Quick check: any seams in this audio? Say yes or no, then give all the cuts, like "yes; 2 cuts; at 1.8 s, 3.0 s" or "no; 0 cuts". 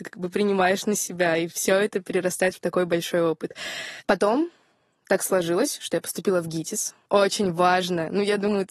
yes; 2 cuts; at 4.0 s, 7.1 s